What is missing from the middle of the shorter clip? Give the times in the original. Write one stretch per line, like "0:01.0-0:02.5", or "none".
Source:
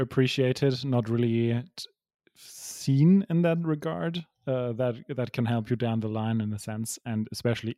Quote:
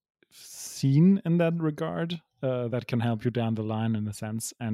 0:04.7-0:05.2

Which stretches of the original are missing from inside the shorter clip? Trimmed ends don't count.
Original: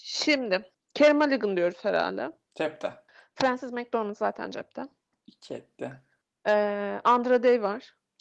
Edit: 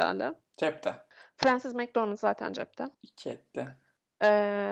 0:04.9-0:05.2

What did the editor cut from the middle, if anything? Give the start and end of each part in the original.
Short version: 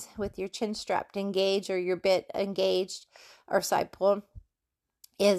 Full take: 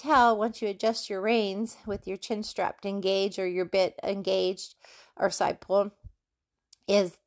none

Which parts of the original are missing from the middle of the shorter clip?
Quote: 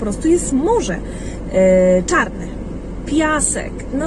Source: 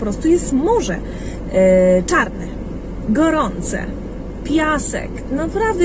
0:03.0-0:04.4

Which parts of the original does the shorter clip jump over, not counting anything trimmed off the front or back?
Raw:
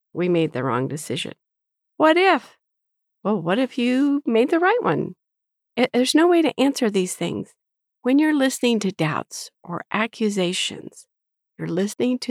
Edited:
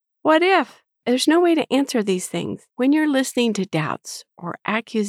0:02.8-0:05.9
0:07.6-0:08.0

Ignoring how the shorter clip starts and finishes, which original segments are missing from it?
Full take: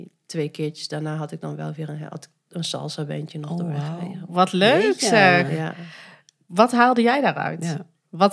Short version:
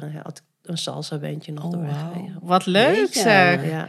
none

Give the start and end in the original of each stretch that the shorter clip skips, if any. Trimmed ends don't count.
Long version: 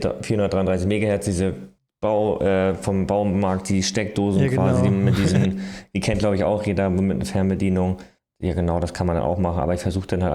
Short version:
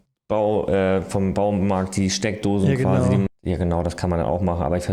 0:05.0-0:08.2

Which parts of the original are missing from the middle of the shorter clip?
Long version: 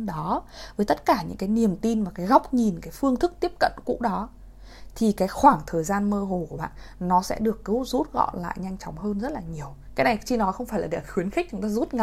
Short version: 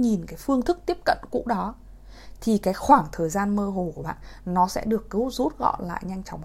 none

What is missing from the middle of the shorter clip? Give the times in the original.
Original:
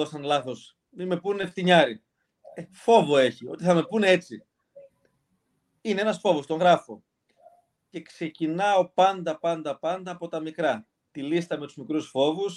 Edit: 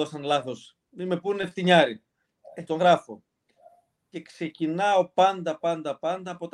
0:02.7-0:06.5

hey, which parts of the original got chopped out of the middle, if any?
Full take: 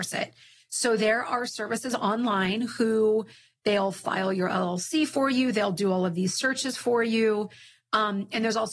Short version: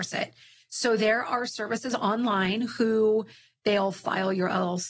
none

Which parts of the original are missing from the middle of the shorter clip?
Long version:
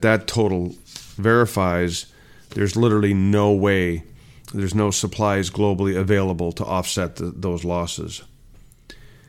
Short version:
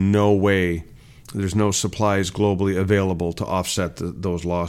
none

